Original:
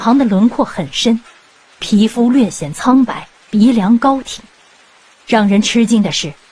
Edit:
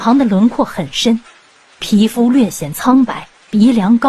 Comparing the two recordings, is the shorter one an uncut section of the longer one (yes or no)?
yes